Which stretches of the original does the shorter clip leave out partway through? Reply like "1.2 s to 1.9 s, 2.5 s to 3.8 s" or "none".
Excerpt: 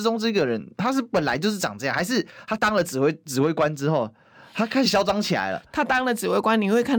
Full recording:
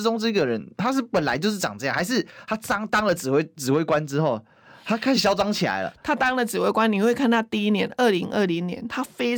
2.6 s to 2.9 s